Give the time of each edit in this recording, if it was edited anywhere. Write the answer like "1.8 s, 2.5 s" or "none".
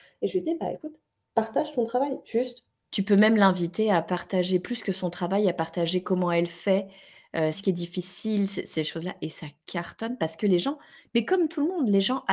2.8 s, 7.5 s

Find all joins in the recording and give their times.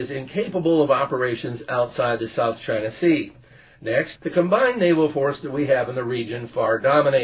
4.2 s

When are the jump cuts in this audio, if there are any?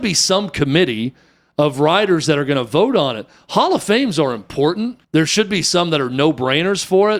5.0 s

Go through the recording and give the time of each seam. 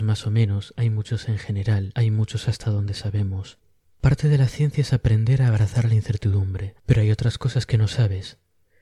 6.8 s

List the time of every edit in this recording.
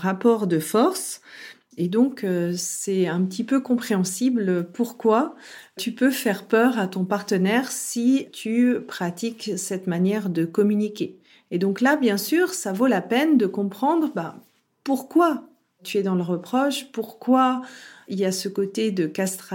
none

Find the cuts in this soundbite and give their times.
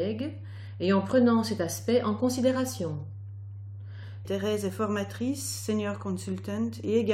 4.2 s

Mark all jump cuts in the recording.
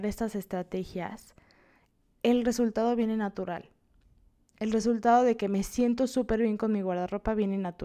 none

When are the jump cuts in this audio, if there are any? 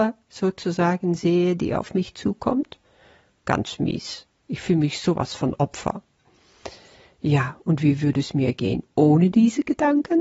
none

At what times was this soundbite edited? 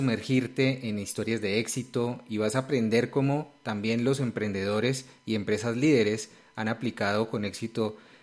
none

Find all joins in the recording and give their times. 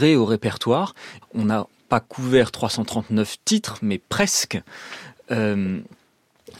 1.2 s

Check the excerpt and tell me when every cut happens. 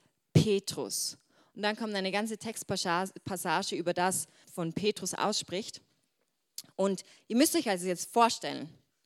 4.4 s

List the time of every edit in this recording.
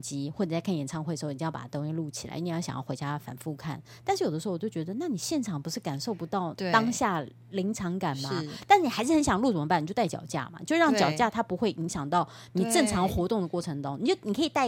none

